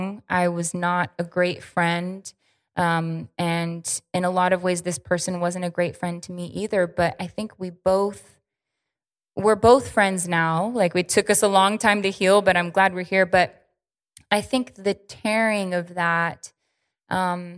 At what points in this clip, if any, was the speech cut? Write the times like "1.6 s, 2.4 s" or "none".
none